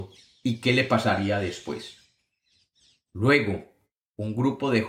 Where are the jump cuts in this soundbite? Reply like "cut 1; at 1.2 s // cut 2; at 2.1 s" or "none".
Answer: none